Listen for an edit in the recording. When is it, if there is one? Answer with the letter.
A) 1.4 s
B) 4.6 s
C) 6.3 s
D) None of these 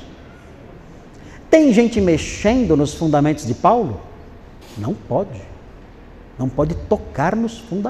B